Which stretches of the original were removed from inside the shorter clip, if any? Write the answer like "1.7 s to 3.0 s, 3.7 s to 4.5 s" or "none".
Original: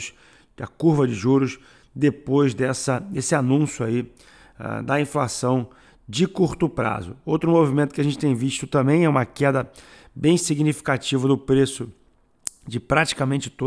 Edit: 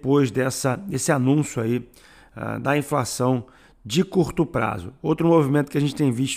none